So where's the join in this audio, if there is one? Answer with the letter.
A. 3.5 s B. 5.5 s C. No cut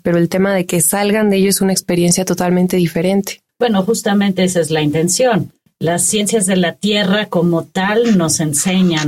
C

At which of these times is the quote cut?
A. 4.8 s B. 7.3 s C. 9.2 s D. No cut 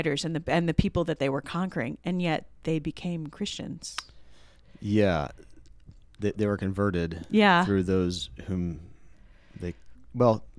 D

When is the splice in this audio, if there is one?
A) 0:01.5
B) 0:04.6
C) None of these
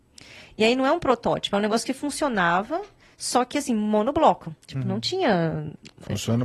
B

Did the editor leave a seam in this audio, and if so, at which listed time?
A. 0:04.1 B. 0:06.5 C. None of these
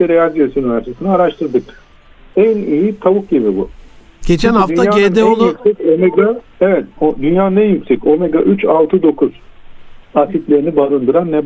B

